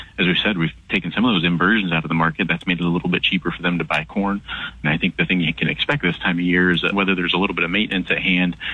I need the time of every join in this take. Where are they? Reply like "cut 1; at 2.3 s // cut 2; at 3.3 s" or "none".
cut 1; at 4.8 s // cut 2; at 6.9 s